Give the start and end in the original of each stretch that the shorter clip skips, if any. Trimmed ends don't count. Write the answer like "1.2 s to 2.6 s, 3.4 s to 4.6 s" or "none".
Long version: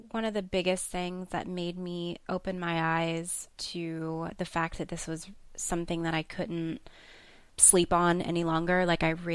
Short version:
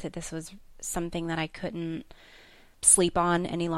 none